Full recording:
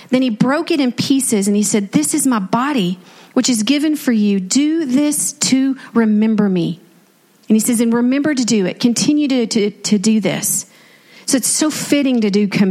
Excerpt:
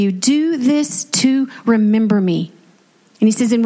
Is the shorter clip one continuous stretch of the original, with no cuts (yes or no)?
yes